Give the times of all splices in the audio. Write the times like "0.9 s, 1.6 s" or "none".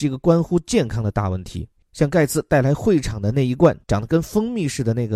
3.8 s